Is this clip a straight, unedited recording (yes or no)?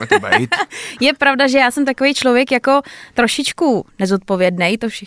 yes